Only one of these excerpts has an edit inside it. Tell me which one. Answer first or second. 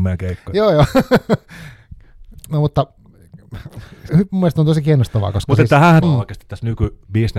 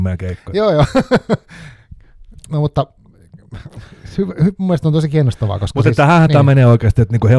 first